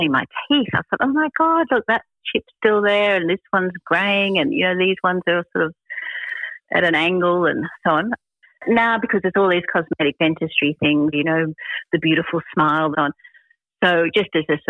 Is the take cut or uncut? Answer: cut